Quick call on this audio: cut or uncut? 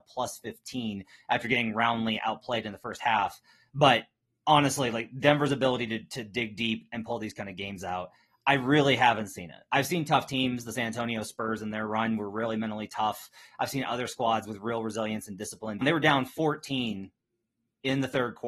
cut